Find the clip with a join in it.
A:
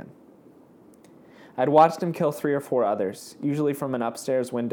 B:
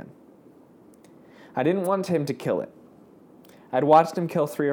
A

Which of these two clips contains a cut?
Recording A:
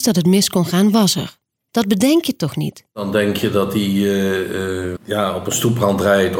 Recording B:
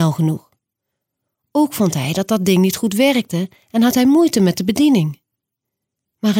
A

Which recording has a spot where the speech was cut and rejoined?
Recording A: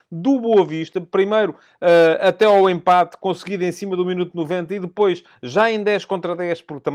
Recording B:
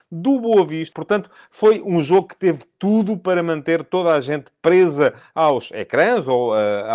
B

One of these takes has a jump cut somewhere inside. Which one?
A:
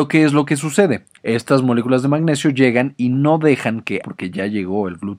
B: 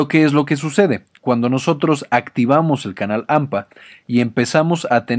A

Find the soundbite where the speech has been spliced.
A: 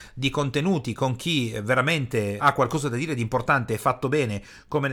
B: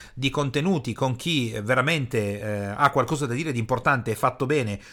A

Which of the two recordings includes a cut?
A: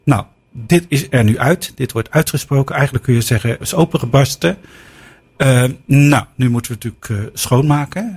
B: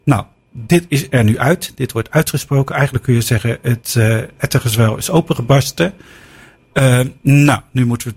A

